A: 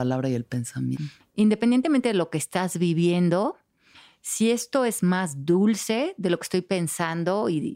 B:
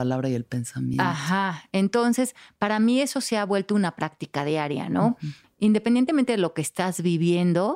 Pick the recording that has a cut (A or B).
A